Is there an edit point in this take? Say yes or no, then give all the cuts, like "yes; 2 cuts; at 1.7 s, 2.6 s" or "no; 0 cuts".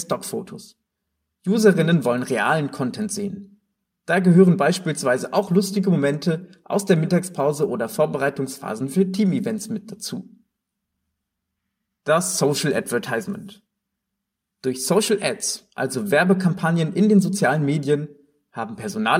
no; 0 cuts